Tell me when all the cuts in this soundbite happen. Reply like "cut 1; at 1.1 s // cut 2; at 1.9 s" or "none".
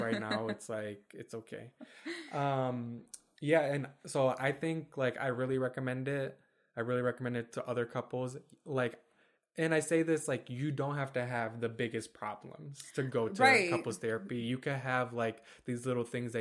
none